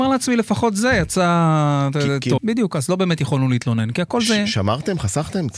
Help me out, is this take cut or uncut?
cut